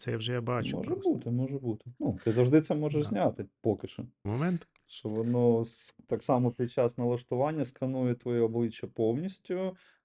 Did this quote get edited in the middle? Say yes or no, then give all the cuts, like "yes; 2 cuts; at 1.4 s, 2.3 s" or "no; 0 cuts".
yes; 1 cut; at 4.3 s